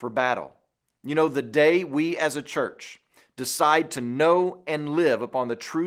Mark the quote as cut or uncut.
cut